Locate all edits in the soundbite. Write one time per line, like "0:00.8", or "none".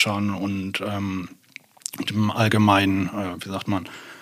none